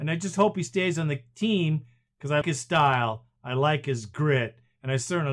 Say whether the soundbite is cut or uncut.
cut